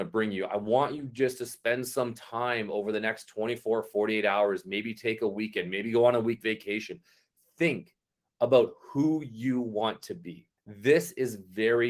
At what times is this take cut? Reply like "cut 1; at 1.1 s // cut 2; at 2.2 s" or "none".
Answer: cut 1; at 10.6 s